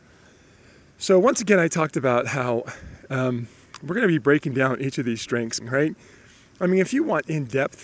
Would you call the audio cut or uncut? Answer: cut